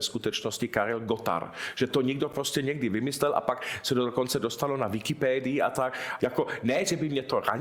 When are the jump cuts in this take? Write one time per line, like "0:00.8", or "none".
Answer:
0:06.2